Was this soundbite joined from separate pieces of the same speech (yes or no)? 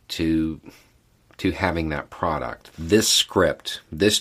yes